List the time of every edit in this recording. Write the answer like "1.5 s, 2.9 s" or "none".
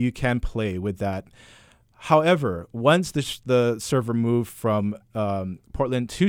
none